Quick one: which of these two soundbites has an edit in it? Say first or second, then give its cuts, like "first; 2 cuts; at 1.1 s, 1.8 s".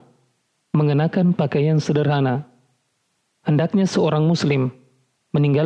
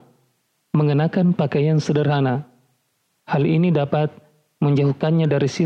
second; 1 cut; at 3.2 s